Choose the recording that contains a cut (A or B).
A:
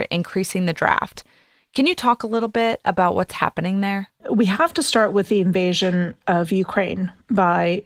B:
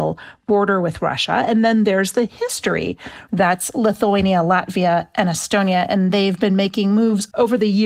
B